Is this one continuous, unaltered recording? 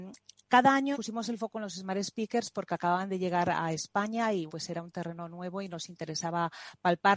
no; 2 cuts; at 0.9 s, 4.5 s

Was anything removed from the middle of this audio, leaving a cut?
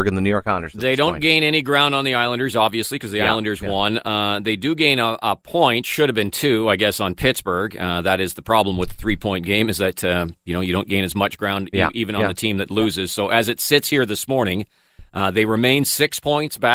no; 0 cuts

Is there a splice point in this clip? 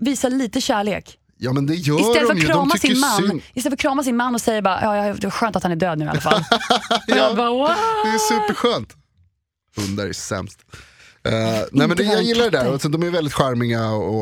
no; 0 cuts

